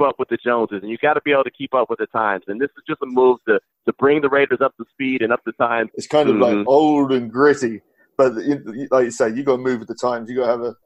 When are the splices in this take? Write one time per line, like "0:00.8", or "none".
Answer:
0:05.9